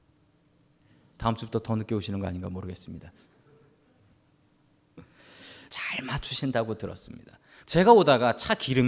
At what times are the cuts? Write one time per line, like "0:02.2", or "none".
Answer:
0:05.7
0:07.6